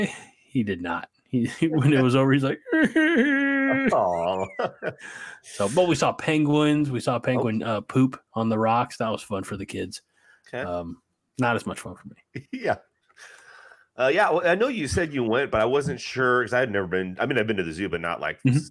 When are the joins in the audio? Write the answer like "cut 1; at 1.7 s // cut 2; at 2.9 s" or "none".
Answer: none